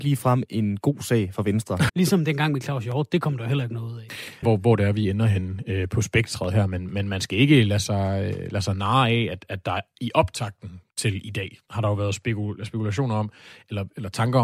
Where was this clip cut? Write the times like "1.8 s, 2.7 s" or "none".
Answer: 1.9 s, 4.4 s

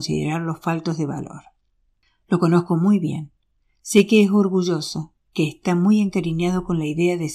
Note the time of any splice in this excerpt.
none

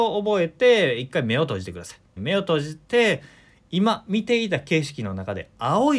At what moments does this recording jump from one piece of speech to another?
2.2 s

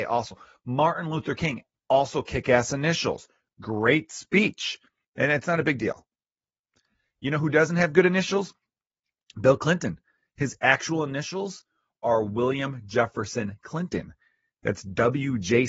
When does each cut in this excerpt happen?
1.7 s, 5.0 s

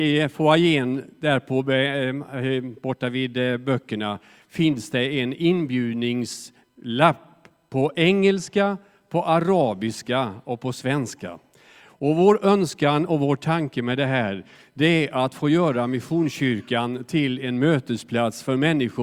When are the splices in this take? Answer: none

